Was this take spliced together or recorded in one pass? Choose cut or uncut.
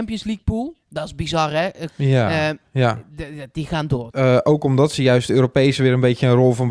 cut